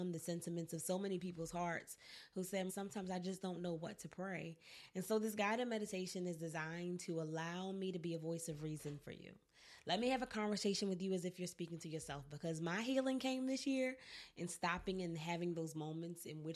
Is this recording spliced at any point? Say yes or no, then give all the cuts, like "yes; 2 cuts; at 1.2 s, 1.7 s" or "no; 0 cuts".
yes; 1 cut; at 2.7 s